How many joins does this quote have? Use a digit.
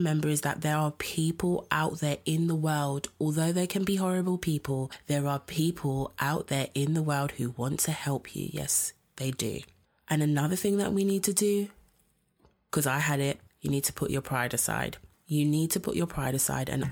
0